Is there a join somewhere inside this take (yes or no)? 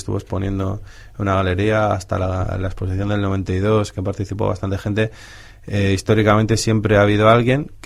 no